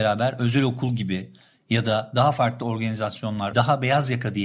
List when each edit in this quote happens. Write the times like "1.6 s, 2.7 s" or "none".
3.5 s